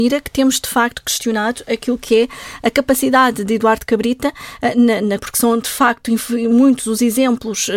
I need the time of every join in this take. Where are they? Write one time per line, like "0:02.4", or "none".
0:05.2